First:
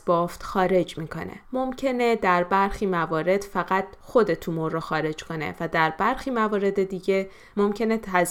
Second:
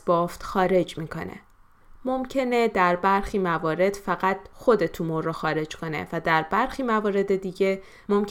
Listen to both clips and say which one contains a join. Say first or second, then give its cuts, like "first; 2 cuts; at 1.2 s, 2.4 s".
first; 1 cut; at 1.4 s